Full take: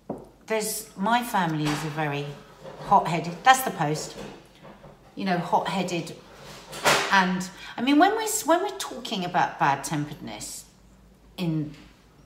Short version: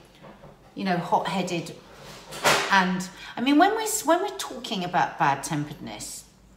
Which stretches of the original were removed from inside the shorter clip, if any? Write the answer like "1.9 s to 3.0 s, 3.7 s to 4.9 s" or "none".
none

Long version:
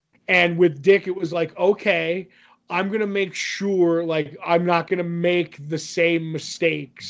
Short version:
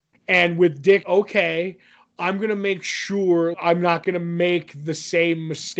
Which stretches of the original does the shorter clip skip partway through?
1.0 s to 1.5 s, 4.0 s to 4.4 s

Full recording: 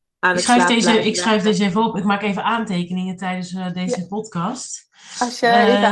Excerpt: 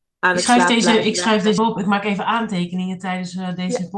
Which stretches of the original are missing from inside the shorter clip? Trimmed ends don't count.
1.6 s to 1.8 s

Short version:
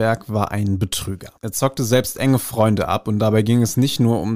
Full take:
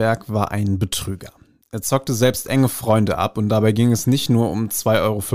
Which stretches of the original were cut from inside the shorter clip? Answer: 1.4 s to 1.7 s

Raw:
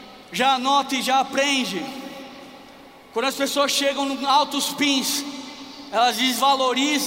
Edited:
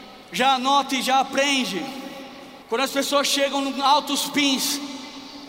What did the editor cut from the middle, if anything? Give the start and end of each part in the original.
2.6 s to 3.1 s

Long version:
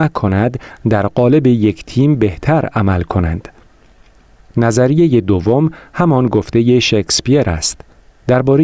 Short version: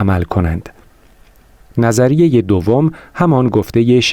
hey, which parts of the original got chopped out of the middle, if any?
none

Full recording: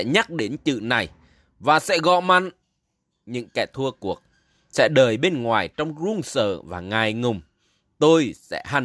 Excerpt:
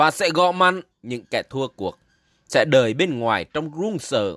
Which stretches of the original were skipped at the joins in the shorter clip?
2.6 s to 3.1 s

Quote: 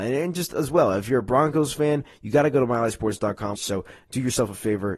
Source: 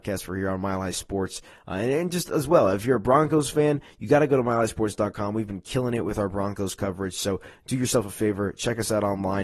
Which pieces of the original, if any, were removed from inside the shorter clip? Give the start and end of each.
5.3 s to 7.1 s

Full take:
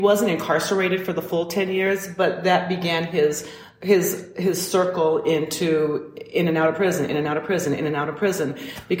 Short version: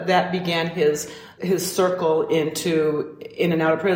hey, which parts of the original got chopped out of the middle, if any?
3.7 s to 4.3 s

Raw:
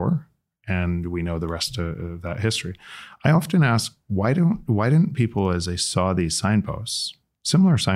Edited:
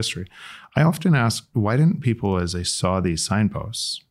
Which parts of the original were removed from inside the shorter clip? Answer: 4.0 s to 4.7 s

